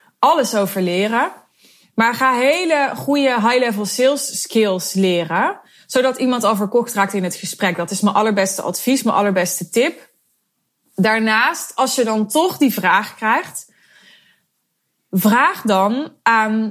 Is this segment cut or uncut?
uncut